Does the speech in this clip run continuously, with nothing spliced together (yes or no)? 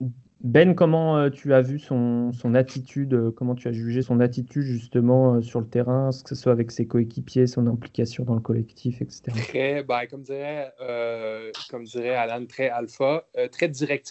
no